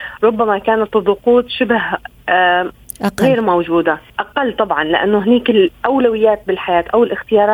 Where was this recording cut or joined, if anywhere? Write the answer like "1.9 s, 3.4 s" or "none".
4.1 s